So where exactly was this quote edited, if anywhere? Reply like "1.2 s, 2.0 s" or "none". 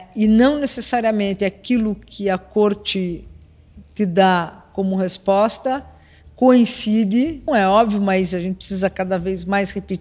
7.5 s